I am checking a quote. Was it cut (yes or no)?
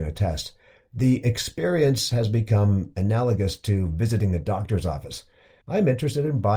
yes